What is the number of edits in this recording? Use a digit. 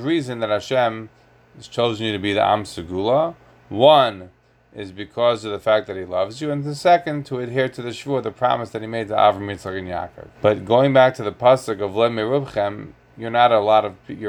1